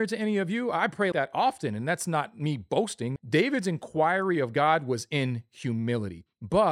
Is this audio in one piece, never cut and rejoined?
no; 2 cuts; at 1.1 s, 3.2 s

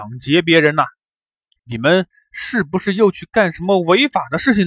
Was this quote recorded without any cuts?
no; 1 cut; at 1.6 s

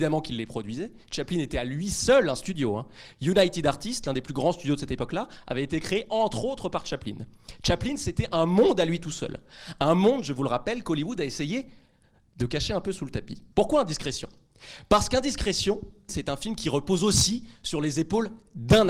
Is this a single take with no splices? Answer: no; 2 cuts; at 13.5 s, 16.1 s

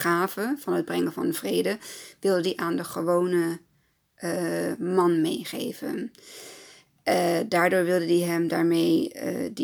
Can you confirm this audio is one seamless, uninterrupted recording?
yes; 0 cuts

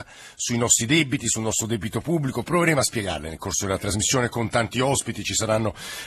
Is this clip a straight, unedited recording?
yes; 0 cuts

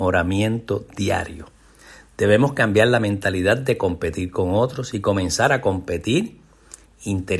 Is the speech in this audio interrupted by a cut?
no; 0 cuts

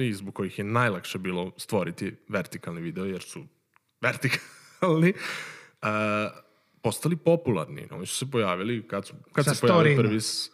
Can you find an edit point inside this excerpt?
no; 0 cuts

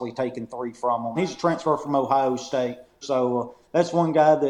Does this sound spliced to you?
yes; 2 cuts; at 1.2 s, 3.0 s

